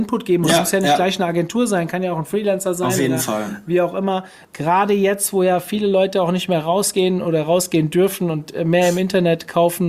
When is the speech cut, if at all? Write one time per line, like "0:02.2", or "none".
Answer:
0:04.4

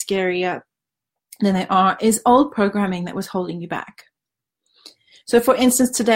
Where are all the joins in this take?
none

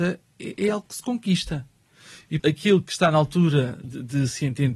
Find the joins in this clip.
0:02.4
0:03.8

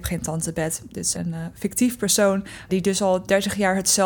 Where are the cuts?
0:01.1
0:02.7

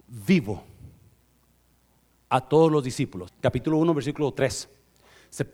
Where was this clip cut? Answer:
0:03.3

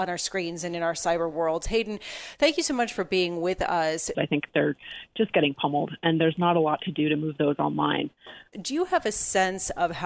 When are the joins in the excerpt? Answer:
0:04.1
0:08.5

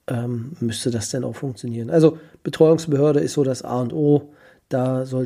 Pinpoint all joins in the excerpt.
none

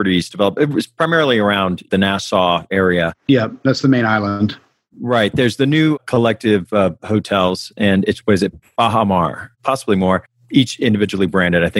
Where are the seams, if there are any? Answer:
0:09.5

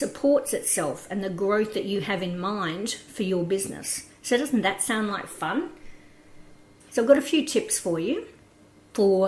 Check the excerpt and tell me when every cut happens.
0:06.8

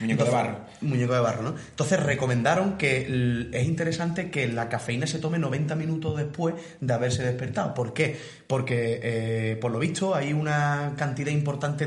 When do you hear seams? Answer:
0:03.5

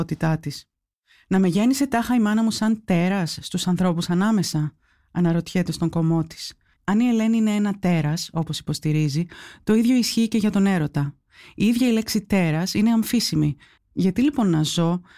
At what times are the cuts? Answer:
0:06.8
0:13.8

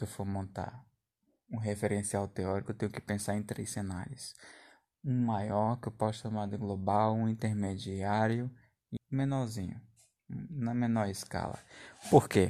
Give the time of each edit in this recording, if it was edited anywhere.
0:09.0

